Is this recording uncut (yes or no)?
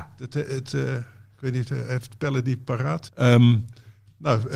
no